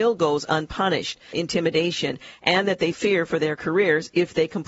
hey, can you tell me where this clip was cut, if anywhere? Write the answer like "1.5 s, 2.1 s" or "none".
1.3 s, 2.9 s